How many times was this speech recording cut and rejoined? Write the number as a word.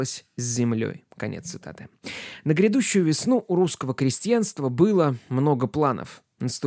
zero